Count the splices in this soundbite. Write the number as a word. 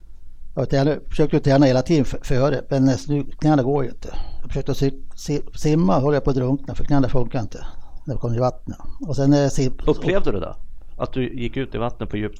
zero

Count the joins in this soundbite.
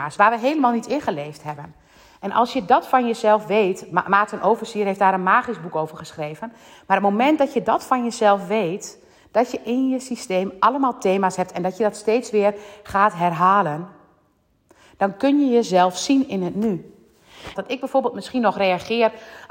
one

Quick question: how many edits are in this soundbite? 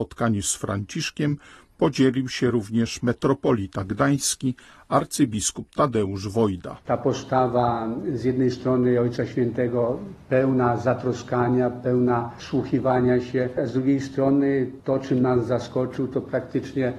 zero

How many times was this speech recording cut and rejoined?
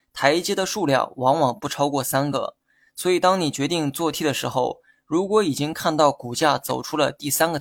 zero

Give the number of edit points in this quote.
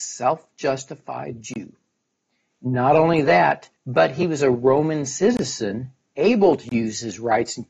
two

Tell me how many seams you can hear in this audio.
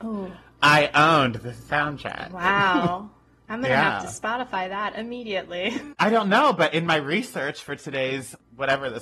one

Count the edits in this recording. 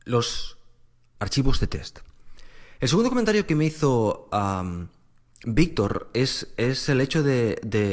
zero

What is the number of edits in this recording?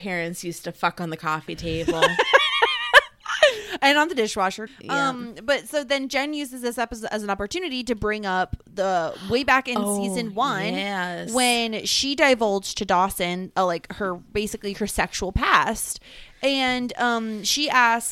one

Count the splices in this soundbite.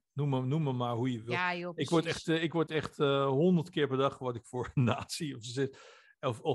zero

